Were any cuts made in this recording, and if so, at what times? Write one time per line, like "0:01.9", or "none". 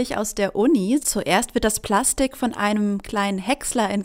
0:01.0